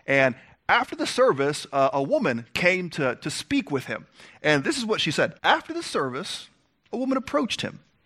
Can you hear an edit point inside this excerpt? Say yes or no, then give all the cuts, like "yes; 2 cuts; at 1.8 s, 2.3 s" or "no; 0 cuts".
yes; 2 cuts; at 5.4 s, 6.9 s